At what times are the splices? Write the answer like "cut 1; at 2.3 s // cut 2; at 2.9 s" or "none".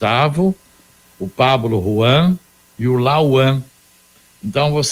cut 1; at 1.0 s